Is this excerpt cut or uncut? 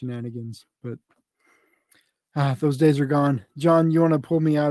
uncut